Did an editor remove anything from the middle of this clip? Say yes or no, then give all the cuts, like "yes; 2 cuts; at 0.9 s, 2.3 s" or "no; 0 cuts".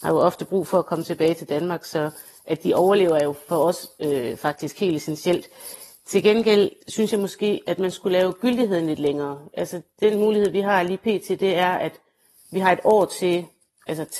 no; 0 cuts